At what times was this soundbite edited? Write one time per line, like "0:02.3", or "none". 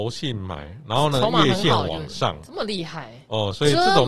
none